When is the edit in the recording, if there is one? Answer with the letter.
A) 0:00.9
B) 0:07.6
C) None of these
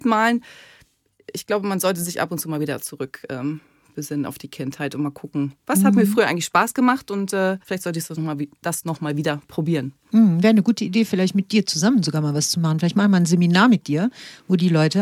B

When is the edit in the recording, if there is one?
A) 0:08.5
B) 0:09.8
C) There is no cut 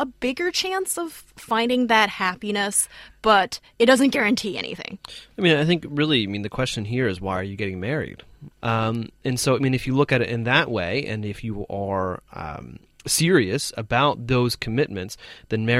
A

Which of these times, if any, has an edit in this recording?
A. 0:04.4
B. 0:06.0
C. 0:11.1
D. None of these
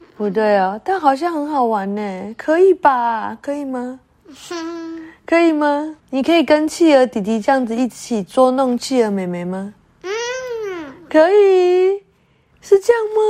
B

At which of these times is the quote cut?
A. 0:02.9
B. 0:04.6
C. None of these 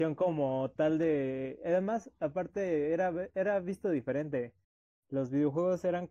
C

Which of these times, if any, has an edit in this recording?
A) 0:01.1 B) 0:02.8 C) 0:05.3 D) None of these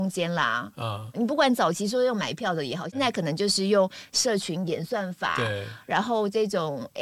A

